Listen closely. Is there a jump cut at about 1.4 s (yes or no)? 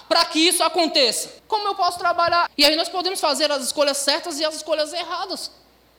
yes